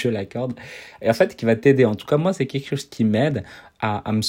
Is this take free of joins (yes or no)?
yes